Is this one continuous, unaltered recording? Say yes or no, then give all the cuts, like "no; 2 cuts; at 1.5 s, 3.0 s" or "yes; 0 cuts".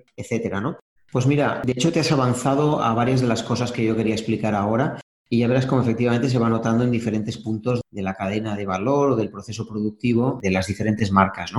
no; 1 cut; at 1.0 s